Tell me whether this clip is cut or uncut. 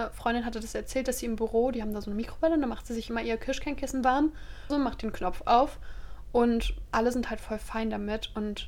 cut